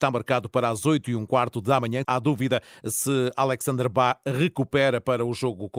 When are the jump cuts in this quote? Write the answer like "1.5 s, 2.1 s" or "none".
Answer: 2.0 s